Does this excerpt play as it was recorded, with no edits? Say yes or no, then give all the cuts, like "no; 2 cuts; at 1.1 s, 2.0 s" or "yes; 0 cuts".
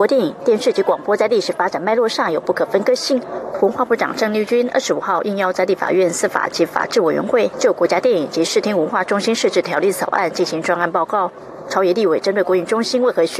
no; 2 cuts; at 3.5 s, 7.5 s